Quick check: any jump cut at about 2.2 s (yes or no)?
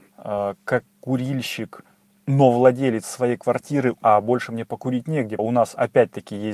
no